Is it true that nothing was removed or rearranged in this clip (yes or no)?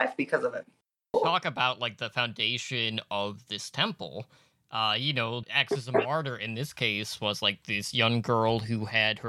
no